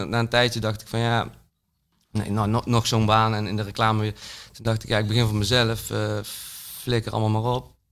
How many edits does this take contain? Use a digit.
0